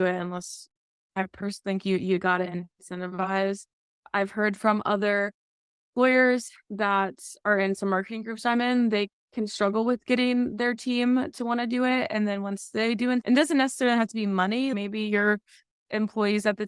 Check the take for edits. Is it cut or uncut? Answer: uncut